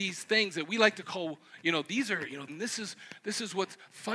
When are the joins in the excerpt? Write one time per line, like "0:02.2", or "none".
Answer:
0:02.5